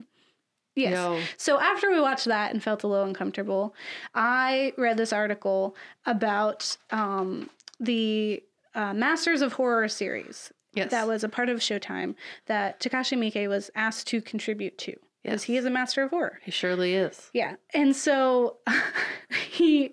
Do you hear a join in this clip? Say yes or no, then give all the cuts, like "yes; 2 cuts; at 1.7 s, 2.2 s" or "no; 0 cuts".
no; 0 cuts